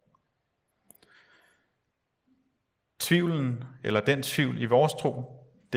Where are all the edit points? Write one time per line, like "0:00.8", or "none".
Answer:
none